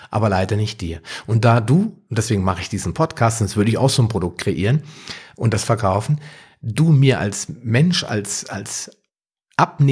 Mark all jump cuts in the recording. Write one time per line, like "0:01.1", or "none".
none